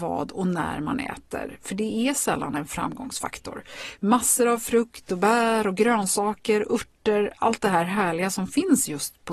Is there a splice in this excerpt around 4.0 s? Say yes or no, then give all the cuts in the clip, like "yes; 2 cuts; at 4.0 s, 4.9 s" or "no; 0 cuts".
yes; 1 cut; at 4.0 s